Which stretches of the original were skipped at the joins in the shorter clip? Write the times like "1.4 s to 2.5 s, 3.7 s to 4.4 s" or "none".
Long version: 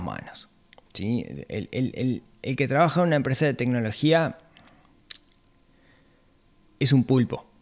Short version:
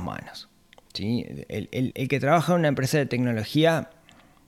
1.9 s to 2.4 s